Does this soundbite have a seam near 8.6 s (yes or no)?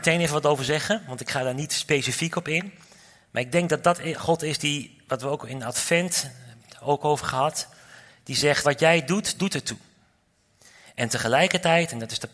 yes